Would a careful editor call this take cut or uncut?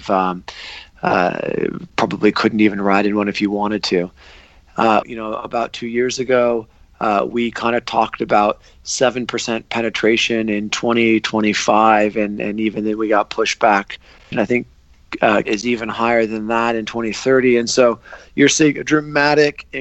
cut